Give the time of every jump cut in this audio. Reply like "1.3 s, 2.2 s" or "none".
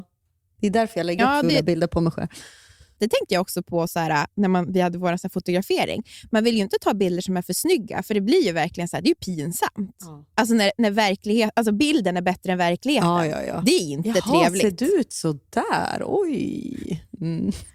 3.0 s